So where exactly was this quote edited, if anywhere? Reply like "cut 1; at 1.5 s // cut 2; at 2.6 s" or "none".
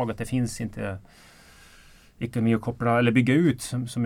none